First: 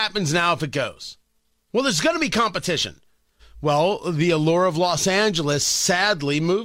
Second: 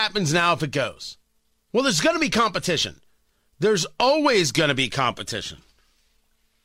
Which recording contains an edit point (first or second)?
first